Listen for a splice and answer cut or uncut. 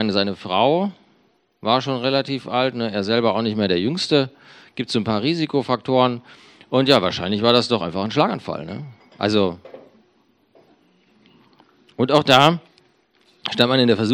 uncut